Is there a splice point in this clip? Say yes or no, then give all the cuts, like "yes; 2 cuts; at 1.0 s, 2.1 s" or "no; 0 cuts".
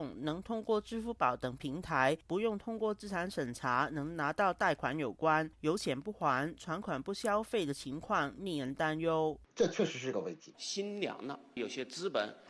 yes; 2 cuts; at 9.5 s, 10.5 s